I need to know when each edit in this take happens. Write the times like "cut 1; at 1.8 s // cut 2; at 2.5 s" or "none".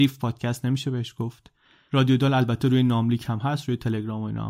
none